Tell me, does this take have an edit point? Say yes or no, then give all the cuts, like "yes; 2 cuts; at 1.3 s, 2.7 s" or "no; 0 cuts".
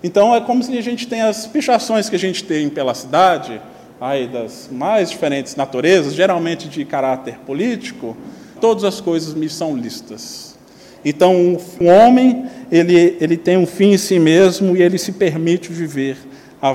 yes; 2 cuts; at 8.6 s, 11.8 s